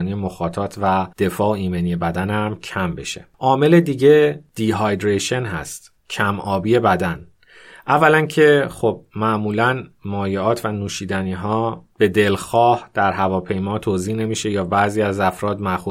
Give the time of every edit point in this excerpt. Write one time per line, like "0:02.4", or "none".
0:01.1
0:06.0

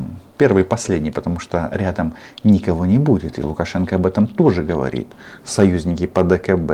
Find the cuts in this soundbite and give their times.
none

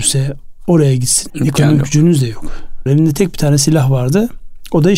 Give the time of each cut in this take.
0:01.3
0:02.9

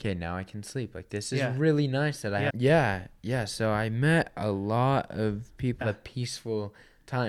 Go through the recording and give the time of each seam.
0:02.5
0:05.8

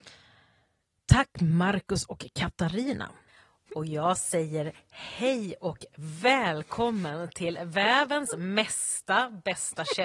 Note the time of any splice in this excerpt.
none

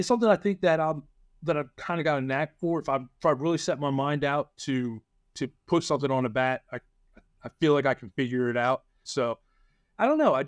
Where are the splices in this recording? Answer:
0:09.0

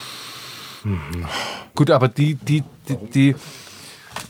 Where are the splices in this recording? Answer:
0:01.7

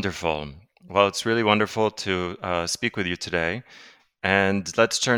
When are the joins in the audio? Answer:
none

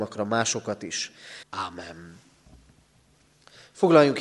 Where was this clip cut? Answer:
0:01.4

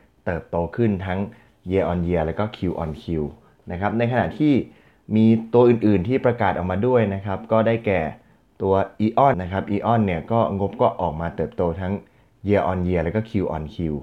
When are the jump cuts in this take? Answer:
0:09.3

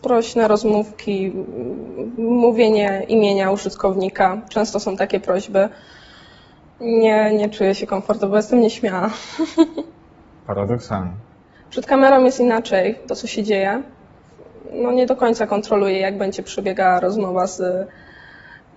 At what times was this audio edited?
0:13.1

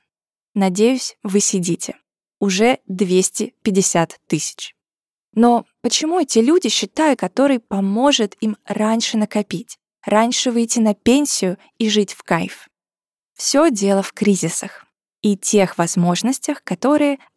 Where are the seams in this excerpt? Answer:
0:07.2

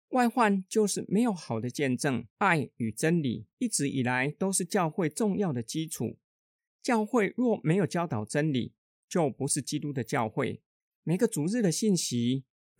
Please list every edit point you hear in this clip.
0:02.3
0:10.9

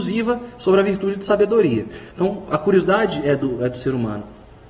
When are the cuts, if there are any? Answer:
0:02.1

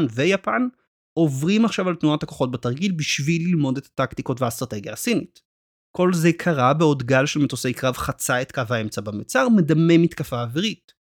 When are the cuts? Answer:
0:05.8

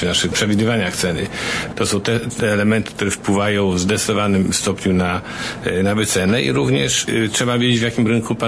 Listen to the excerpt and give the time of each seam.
0:01.7

